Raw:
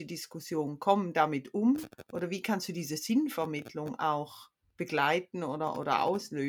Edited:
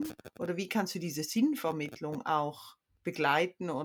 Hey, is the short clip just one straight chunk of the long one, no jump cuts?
yes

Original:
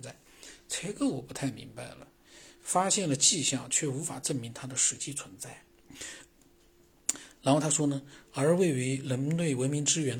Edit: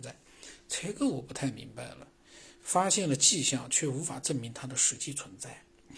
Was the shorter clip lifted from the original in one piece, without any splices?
yes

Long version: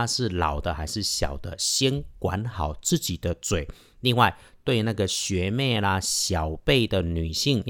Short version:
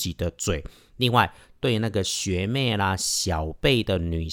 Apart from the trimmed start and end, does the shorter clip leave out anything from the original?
no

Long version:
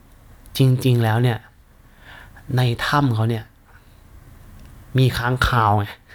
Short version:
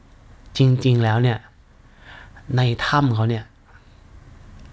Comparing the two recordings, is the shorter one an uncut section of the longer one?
yes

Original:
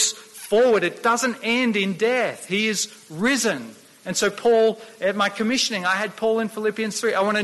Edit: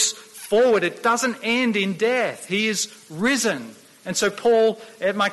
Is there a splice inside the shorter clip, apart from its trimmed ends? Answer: no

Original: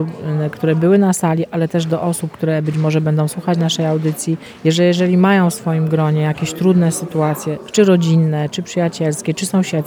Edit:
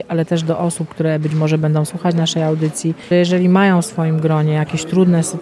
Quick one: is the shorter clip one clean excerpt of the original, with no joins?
no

